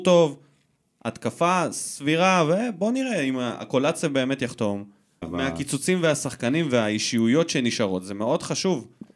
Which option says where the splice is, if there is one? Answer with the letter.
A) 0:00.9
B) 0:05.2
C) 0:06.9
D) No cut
B